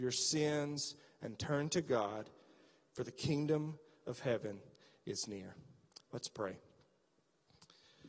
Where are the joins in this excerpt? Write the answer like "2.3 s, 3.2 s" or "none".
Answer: none